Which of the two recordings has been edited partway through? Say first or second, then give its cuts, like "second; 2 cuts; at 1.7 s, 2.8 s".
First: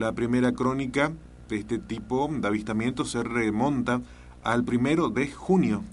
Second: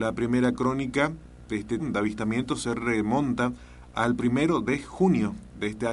second; 1 cut; at 1.8 s